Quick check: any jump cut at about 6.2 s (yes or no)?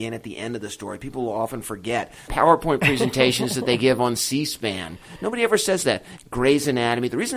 yes